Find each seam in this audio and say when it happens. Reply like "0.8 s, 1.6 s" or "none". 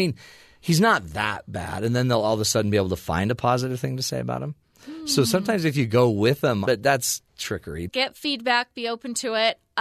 6.7 s, 7.9 s